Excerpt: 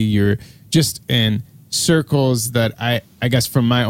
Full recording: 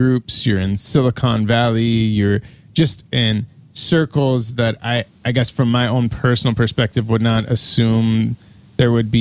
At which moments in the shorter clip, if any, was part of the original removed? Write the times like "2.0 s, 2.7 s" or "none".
none